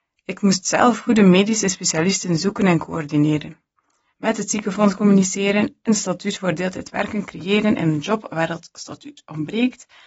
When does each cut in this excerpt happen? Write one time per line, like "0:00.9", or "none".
0:04.1